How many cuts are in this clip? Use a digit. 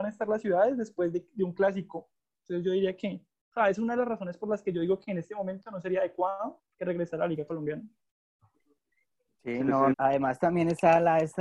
2